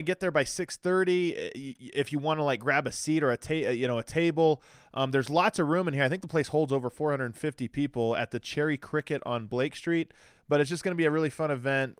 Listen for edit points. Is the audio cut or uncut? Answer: uncut